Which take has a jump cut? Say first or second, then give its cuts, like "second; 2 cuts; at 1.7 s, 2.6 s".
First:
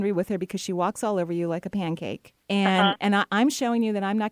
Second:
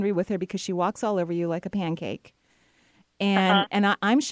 first; 1 cut; at 2.4 s